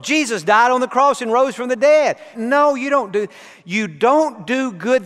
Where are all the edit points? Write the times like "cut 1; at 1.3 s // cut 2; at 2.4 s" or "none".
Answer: cut 1; at 2.3 s